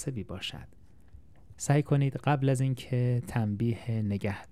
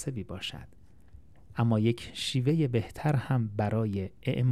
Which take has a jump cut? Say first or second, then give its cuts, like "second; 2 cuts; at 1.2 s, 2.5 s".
first; 1 cut; at 1.5 s